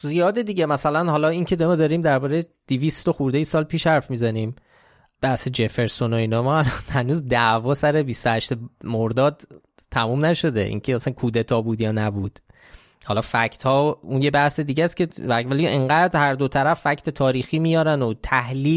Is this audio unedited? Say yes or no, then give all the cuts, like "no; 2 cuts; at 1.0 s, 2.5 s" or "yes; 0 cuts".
yes; 0 cuts